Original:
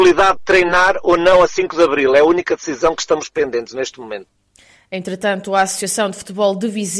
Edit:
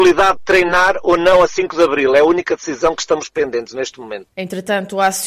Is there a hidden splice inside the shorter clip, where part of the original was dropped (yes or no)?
yes